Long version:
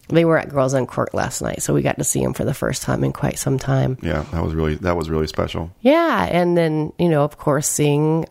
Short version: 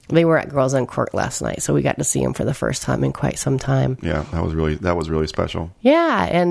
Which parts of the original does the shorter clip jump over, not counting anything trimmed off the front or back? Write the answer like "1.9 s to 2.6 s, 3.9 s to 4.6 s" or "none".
none